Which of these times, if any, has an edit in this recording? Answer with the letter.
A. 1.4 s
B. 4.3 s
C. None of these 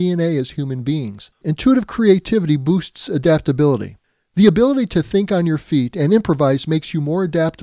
A